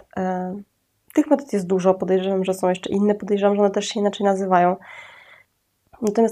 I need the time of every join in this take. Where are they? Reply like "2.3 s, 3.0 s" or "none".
none